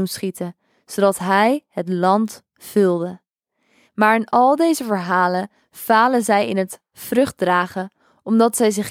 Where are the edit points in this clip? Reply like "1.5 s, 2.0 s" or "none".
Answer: 3.9 s